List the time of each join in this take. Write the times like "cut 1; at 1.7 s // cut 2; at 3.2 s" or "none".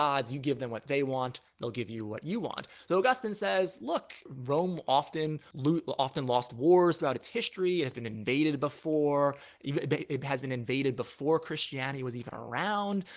none